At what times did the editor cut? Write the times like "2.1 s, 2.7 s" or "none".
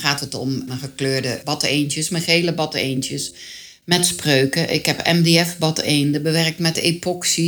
none